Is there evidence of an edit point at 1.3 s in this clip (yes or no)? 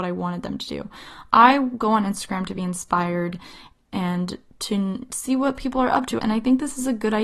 no